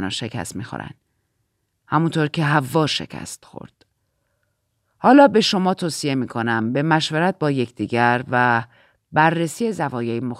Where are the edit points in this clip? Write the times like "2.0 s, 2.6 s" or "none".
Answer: none